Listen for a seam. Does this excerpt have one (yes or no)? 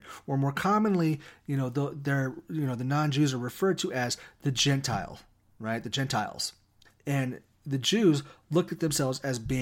yes